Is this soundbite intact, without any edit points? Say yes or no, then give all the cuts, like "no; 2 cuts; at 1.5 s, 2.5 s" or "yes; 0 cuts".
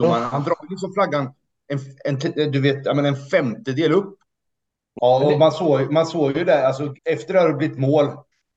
no; 2 cuts; at 5.0 s, 7.0 s